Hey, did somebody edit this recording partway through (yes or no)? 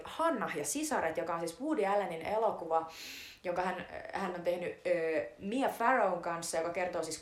no